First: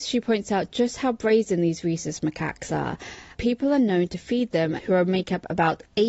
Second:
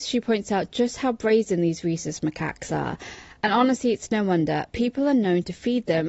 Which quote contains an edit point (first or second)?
first